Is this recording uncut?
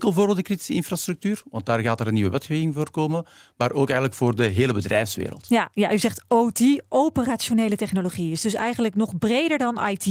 yes; 0 cuts

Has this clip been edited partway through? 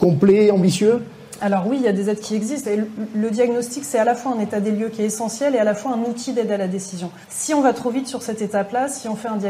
yes; 2 cuts; at 2.6 s, 7.2 s

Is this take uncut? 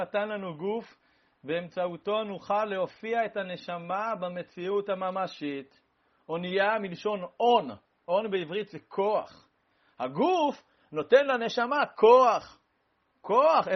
yes; 0 cuts

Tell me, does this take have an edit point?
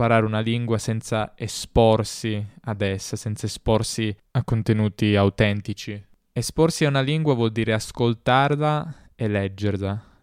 no; 0 cuts

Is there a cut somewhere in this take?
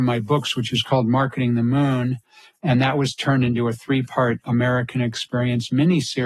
no; 0 cuts

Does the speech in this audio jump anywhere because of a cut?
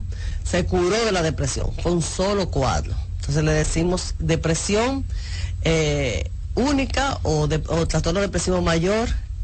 no; 0 cuts

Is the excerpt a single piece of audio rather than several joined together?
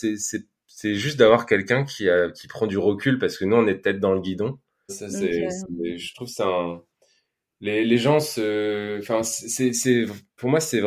no; 1 cut; at 4.9 s

